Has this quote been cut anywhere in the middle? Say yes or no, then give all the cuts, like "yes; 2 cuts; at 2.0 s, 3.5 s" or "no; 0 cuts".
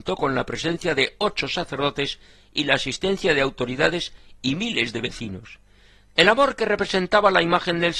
yes; 1 cut; at 6.1 s